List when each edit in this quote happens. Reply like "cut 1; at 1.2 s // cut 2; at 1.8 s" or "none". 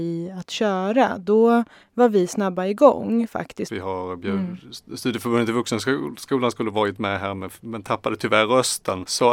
cut 1; at 3.7 s